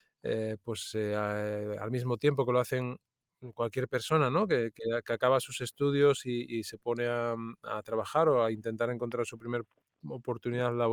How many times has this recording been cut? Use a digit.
0